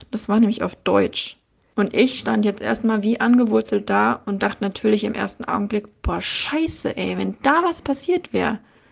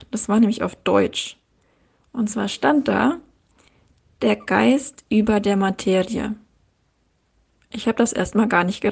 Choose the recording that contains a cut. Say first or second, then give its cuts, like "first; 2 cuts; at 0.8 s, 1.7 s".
first; 1 cut; at 1.7 s